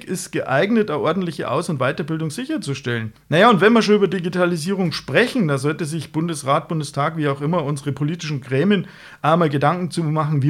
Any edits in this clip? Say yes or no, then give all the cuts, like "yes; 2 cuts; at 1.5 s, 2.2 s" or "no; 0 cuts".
yes; 1 cut; at 3.1 s